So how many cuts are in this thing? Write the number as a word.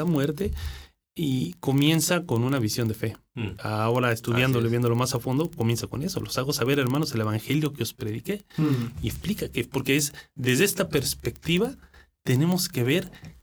one